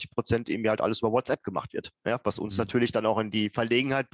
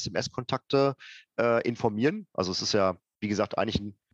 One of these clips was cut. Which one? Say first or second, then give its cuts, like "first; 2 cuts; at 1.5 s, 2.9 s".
second; 1 cut; at 2.3 s